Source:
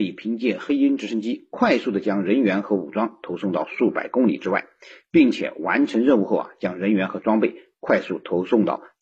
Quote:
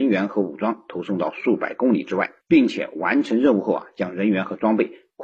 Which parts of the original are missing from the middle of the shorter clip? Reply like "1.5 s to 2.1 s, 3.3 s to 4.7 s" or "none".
4.7 s to 5.0 s